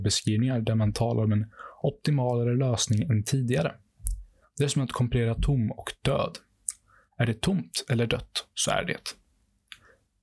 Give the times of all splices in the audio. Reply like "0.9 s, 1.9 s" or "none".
none